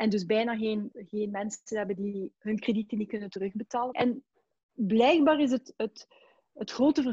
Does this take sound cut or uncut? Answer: cut